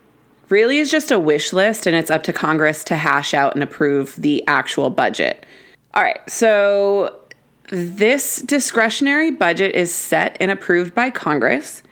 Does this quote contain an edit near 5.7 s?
yes; 1 cut; at 5.7 s

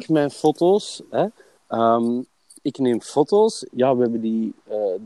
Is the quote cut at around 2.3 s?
no; 1 cut; at 3.7 s

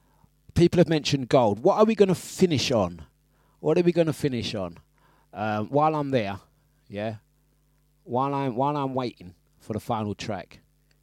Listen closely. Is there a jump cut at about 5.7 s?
no; 0 cuts

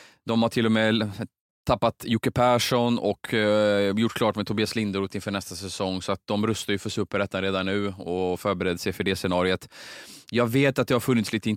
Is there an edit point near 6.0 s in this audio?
no; 0 cuts

